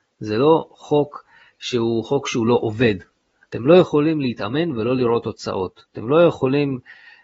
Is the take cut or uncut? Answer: uncut